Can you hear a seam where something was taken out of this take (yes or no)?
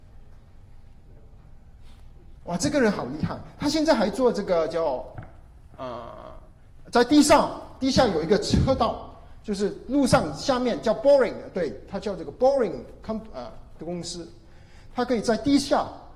yes